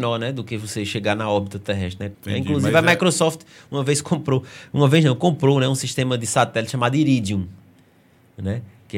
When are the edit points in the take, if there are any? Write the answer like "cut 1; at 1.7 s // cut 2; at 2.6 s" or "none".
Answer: cut 1; at 2.1 s